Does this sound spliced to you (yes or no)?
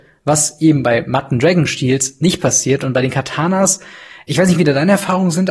no